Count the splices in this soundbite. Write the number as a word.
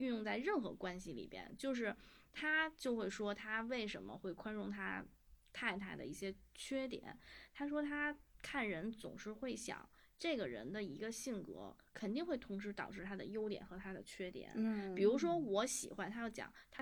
zero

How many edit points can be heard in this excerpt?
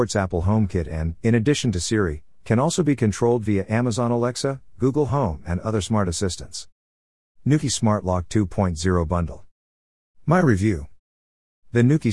zero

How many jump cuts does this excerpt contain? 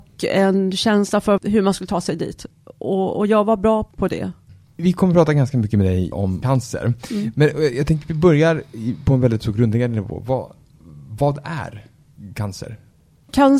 zero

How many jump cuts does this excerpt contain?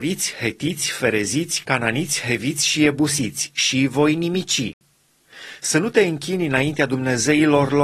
zero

